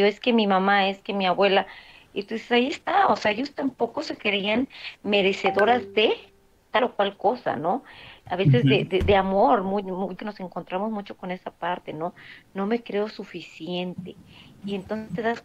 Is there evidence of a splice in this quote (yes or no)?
no